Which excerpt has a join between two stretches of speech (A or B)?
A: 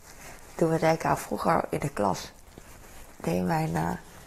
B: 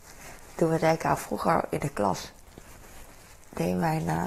A